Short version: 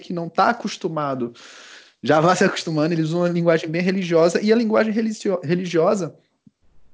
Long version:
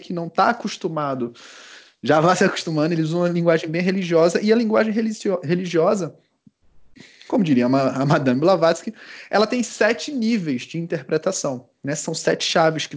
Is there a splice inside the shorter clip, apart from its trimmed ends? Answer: no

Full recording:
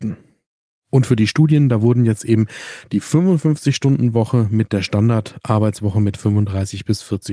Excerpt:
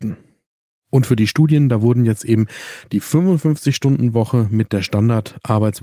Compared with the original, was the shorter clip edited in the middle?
no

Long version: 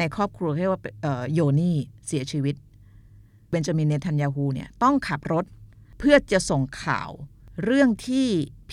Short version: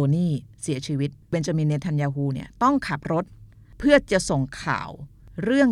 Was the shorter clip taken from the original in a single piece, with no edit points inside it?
no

